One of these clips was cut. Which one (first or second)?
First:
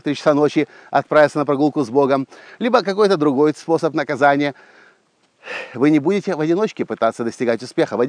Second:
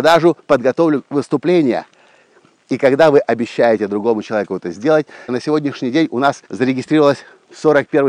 second